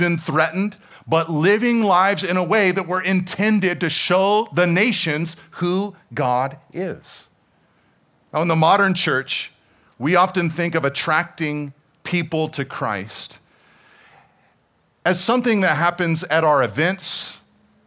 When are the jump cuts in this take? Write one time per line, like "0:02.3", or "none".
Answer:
0:00.9